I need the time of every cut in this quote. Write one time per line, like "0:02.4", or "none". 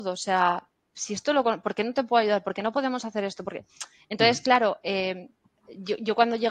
none